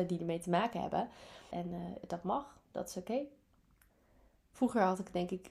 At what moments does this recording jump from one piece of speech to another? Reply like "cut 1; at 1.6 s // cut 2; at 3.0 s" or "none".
cut 1; at 1.5 s